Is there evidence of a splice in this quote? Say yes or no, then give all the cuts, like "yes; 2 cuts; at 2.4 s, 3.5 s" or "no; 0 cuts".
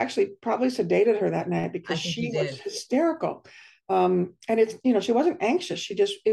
no; 0 cuts